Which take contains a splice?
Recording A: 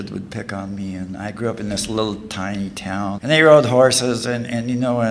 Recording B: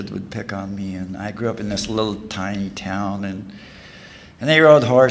A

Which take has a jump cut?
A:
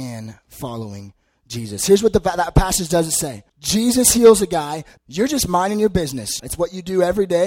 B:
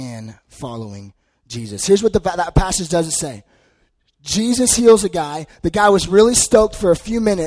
A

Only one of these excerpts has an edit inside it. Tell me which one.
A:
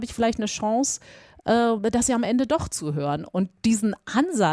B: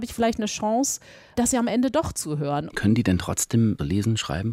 B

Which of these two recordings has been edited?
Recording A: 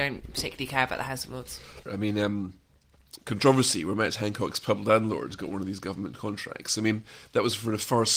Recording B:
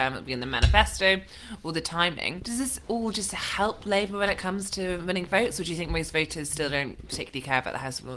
A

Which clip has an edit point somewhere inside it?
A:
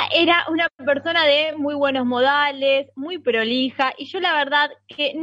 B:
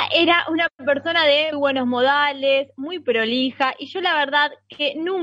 B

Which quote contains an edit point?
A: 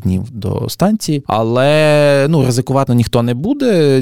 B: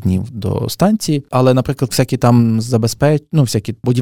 A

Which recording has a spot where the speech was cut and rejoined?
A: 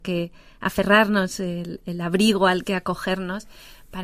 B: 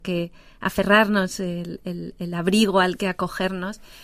A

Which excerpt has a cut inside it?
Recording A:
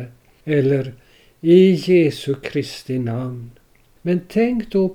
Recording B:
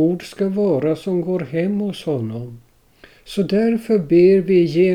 A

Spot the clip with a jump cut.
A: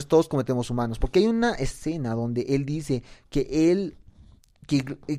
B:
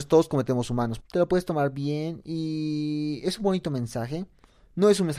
B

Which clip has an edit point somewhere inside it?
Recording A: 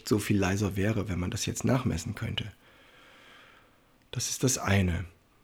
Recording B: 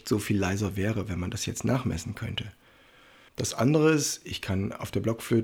B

